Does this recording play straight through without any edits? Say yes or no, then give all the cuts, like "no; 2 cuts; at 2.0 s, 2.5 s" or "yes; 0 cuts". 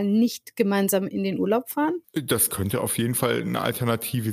no; 1 cut; at 2.0 s